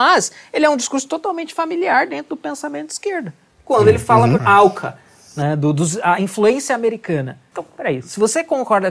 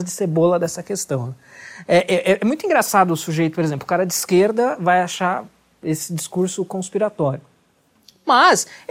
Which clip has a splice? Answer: first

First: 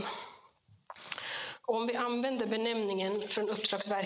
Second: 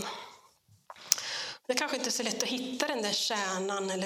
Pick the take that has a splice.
second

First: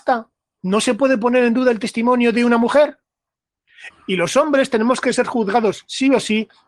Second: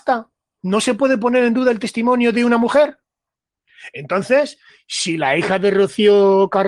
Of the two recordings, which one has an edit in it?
first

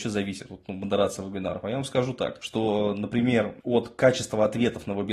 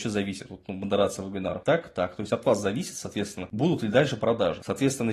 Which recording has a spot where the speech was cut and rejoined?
second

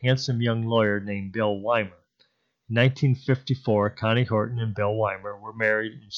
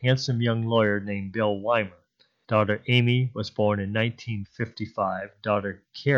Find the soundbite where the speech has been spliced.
second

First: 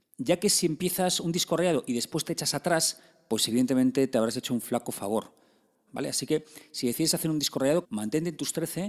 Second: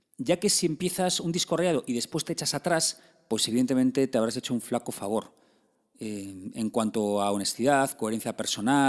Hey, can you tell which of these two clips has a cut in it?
first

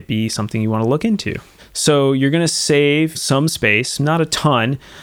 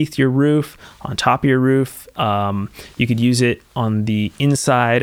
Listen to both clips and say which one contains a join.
first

